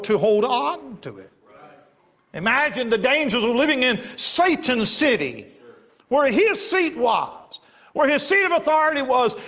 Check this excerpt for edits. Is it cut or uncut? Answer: uncut